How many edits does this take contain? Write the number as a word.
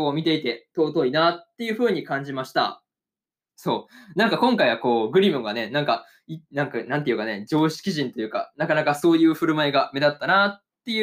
one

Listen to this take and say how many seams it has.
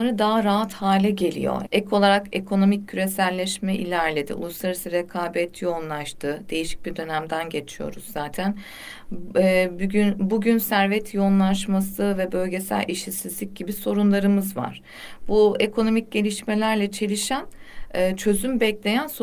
one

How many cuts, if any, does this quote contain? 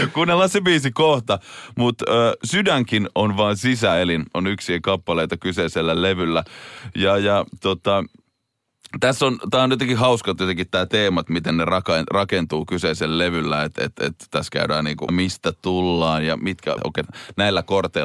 three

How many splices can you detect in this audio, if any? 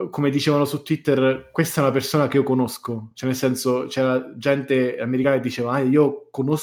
zero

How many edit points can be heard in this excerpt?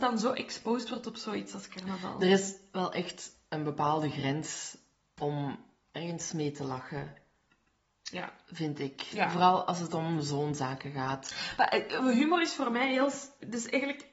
zero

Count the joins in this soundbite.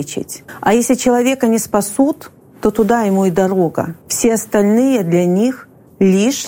one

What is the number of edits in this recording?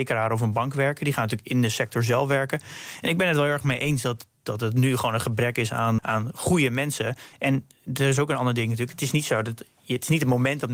one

